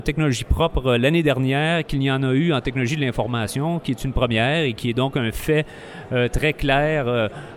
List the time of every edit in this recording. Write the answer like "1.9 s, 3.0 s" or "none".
none